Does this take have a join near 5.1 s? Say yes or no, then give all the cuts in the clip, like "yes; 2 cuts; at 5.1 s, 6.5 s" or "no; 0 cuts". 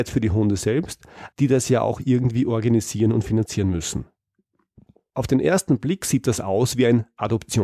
no; 1 cut; at 1.3 s